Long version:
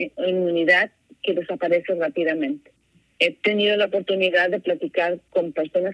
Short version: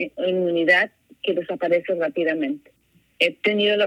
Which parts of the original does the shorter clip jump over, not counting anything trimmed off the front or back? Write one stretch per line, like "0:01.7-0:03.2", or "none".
none